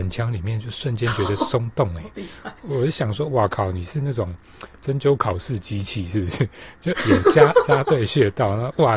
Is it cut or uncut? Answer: uncut